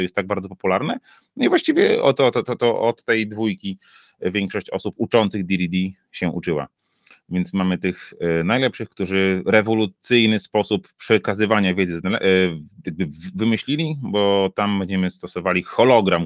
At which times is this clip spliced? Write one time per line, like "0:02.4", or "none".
none

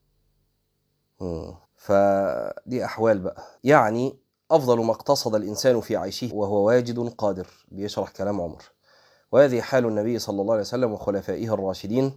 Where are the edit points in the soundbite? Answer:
0:01.6
0:03.6
0:06.3

